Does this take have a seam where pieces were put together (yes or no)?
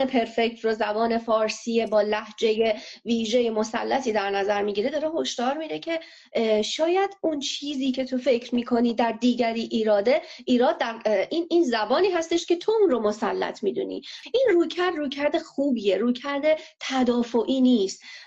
no